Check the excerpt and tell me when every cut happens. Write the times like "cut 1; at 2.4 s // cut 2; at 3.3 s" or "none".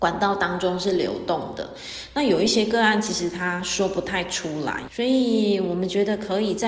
cut 1; at 4.9 s